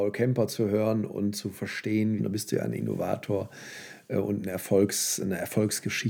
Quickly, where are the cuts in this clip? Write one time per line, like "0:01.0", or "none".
0:02.2